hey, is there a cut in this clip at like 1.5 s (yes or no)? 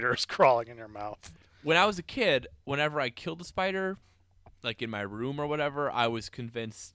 no